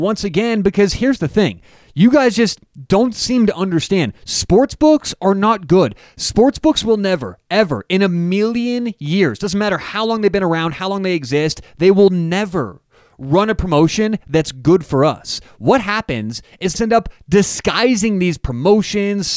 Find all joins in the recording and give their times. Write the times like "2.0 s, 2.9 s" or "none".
16.7 s